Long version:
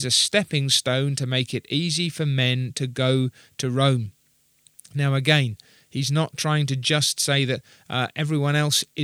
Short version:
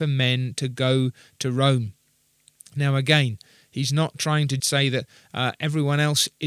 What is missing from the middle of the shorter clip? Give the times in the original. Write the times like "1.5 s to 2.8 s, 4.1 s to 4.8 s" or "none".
6.8 s to 7.2 s